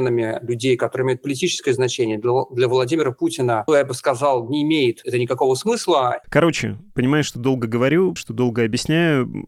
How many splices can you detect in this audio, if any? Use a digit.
3